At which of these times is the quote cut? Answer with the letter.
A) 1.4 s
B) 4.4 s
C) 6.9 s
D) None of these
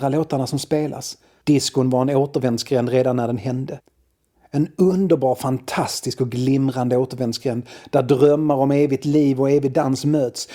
A